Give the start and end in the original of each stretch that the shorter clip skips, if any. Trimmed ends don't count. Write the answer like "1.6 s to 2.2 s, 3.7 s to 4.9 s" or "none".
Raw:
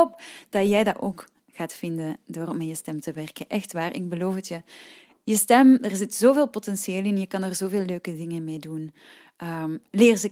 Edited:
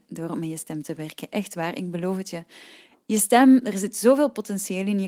none